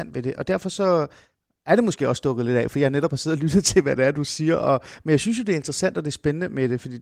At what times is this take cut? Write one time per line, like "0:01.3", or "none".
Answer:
none